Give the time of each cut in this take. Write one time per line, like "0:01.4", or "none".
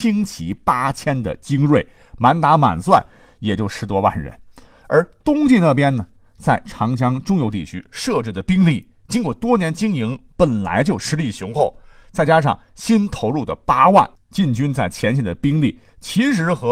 none